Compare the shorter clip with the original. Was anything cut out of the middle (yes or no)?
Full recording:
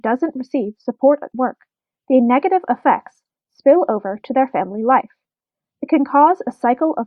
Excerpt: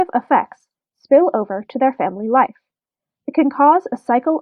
no